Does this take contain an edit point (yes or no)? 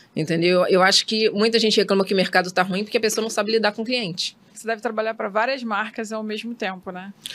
yes